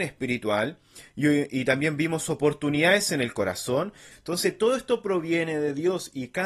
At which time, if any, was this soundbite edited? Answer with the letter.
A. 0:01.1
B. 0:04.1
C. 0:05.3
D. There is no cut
B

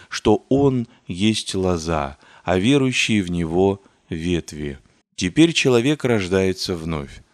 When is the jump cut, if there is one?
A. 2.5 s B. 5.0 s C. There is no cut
B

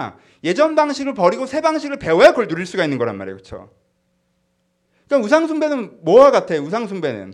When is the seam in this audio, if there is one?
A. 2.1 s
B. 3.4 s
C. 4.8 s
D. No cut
D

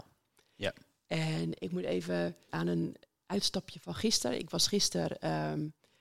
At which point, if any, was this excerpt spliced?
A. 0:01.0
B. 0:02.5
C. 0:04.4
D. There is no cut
B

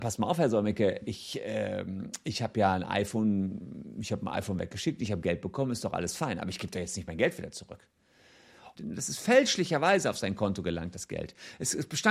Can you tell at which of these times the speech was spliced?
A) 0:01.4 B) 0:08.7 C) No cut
B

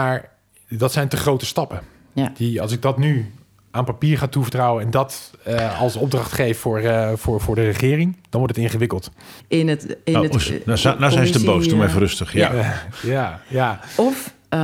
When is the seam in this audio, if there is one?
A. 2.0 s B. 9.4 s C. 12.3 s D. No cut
B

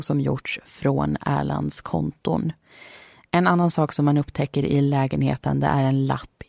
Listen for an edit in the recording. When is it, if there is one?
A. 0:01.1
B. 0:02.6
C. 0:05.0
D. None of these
D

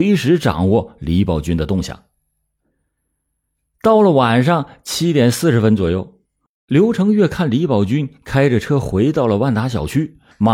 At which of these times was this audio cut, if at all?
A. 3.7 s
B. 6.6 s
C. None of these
C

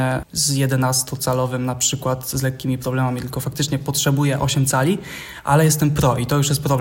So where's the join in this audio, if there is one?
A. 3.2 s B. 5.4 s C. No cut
C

